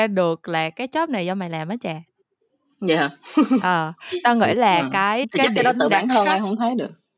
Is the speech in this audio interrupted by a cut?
yes; 1 cut; at 5.2 s

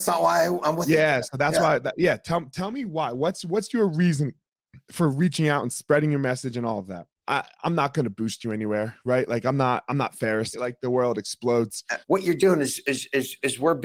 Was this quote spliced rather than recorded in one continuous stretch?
yes; 3 cuts; at 7.2 s, 10.5 s, 12.0 s

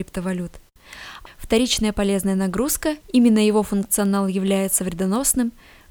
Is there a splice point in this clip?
yes; 2 cuts; at 1.3 s, 3.0 s

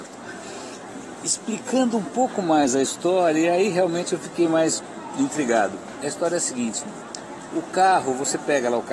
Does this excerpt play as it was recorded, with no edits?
yes; 0 cuts

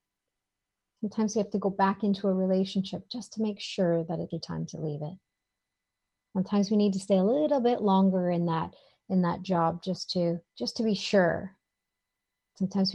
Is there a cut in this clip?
yes; 2 cuts; at 4.3 s, 10.5 s

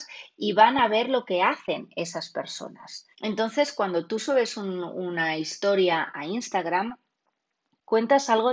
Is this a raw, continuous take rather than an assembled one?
no; 1 cut; at 3.1 s

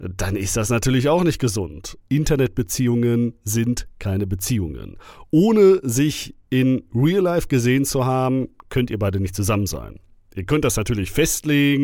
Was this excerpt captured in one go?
no; 1 cut; at 2.0 s

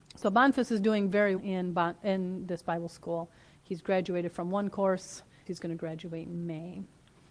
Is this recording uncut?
no; 2 cuts; at 1.4 s, 5.5 s

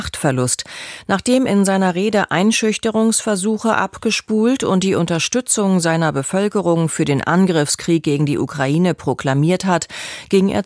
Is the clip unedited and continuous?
no; 1 cut; at 1.5 s

